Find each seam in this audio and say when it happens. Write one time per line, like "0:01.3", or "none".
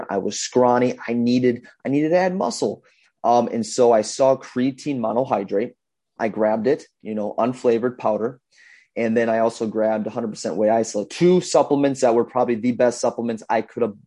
0:06.2